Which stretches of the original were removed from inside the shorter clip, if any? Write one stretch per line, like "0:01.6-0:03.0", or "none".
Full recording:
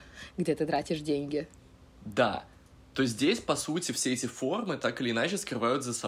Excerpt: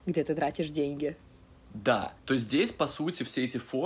0:02.5-0:02.9